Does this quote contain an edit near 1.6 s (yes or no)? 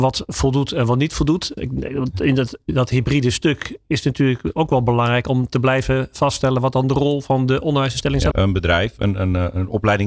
yes